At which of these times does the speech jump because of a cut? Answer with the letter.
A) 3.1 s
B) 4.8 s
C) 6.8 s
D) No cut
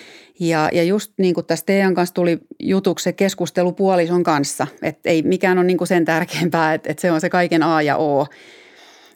D